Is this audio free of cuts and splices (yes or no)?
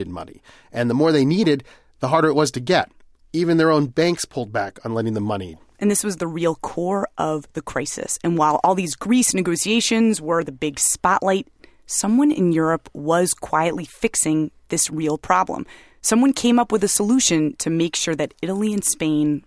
yes